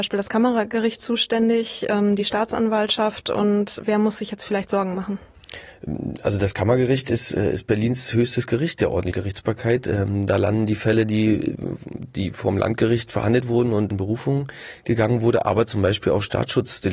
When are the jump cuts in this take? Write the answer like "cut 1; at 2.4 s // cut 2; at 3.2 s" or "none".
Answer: none